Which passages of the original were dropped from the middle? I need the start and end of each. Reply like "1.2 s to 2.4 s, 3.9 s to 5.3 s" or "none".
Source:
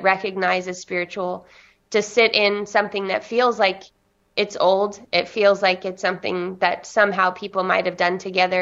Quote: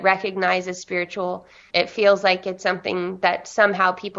1.7 s to 5.1 s